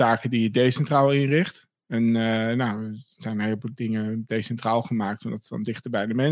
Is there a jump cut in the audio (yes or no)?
no